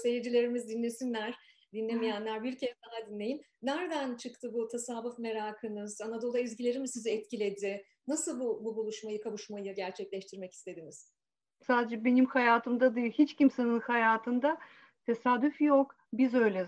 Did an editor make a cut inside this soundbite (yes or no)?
yes